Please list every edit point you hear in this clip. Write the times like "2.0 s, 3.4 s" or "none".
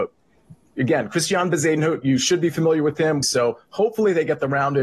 3.2 s